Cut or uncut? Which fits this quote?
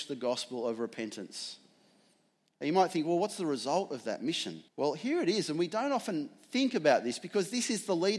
cut